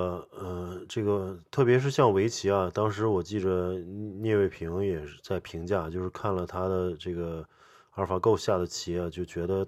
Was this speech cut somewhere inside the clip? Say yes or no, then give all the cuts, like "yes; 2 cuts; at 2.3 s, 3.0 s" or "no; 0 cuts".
no; 0 cuts